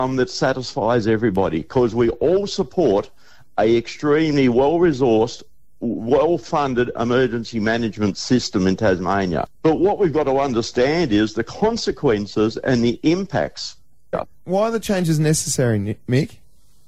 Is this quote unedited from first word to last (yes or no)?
no